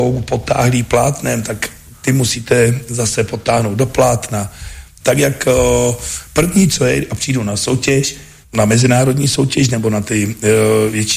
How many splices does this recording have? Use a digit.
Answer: 2